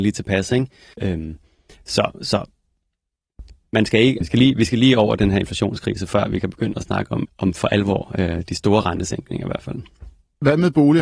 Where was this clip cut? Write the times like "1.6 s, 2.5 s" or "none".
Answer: 0.9 s, 4.2 s, 7.3 s